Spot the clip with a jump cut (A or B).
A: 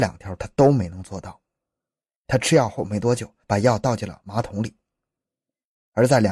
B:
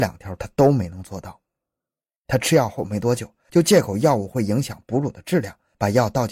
A